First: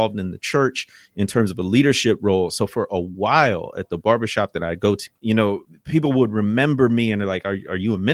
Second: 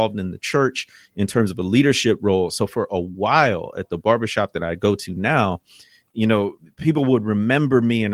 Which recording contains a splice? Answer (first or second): first